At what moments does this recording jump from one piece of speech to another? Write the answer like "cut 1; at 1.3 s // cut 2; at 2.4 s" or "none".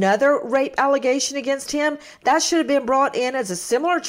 none